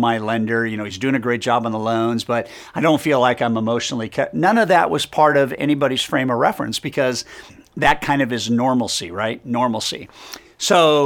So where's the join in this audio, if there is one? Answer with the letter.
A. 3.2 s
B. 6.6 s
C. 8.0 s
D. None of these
D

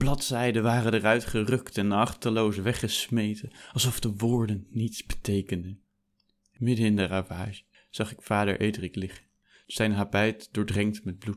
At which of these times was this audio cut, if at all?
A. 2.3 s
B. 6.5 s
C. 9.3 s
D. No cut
D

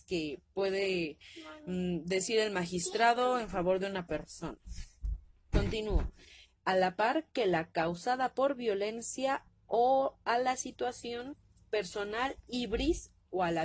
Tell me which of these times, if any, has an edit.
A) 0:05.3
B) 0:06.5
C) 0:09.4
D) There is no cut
B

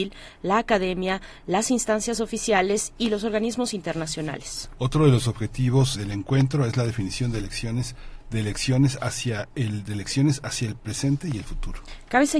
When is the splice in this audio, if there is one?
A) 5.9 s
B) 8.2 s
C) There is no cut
A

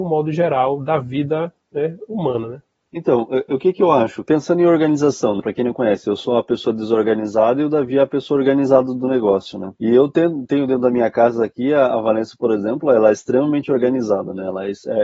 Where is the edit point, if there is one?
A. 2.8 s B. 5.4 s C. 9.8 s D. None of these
B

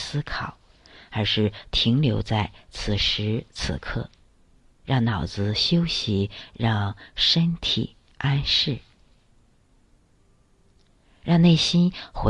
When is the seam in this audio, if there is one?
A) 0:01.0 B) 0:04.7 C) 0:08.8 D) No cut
D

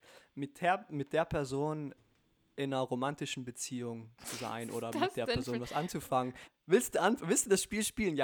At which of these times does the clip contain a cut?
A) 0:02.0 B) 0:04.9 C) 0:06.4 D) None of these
C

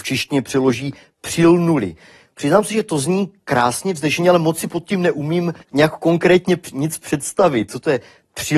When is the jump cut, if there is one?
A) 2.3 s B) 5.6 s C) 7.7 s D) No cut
B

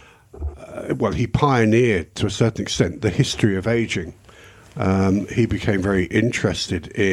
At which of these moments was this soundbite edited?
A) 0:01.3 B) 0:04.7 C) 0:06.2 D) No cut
D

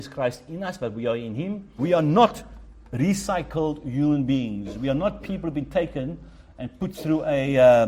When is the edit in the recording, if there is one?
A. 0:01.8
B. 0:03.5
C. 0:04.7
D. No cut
A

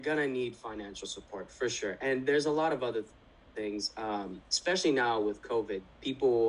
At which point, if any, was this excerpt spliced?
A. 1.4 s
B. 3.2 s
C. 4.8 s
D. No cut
D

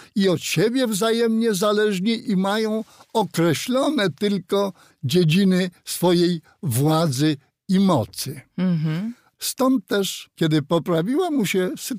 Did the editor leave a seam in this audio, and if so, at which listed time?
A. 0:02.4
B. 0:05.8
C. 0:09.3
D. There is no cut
D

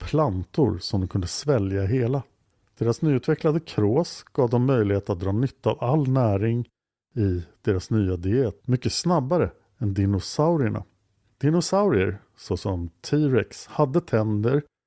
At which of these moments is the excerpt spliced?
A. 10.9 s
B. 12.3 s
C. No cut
C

